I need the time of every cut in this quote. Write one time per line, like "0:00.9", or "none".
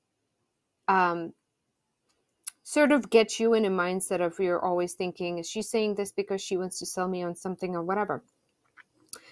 none